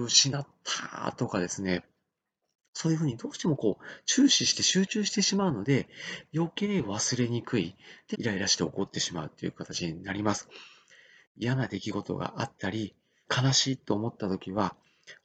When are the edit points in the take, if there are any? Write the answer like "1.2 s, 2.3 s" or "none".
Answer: 8.1 s, 13.2 s